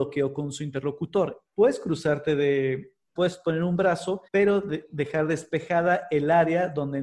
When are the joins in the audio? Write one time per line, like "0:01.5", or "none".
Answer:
0:01.5
0:03.2
0:04.3

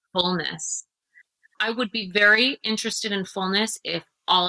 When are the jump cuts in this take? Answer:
0:01.5

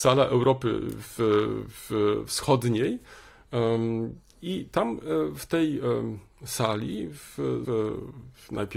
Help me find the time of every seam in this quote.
0:07.6

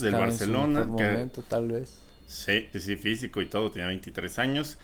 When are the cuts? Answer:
0:02.7

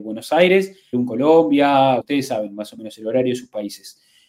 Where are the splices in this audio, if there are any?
0:00.9
0:02.0

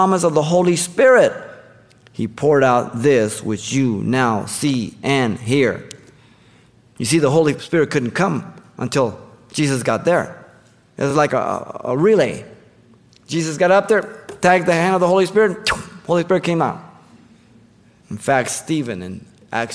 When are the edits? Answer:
none

